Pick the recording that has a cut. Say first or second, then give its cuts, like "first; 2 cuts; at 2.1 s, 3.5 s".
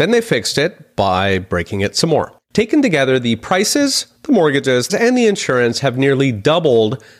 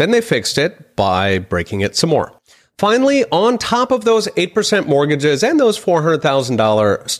first; 2 cuts; at 2.4 s, 4.9 s